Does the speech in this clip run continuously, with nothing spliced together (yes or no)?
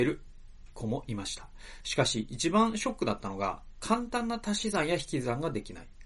yes